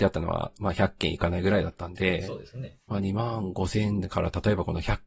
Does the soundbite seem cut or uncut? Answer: uncut